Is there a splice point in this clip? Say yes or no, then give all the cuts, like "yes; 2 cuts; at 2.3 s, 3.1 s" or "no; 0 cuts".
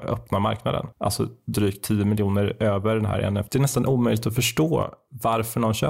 yes; 2 cuts; at 0.9 s, 3.5 s